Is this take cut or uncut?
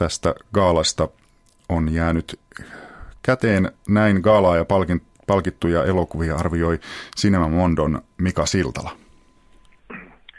uncut